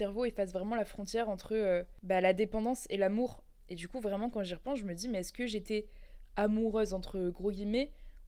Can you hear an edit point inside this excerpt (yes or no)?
no